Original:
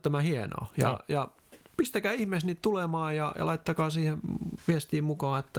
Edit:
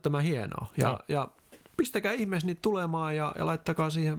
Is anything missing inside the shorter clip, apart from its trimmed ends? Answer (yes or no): no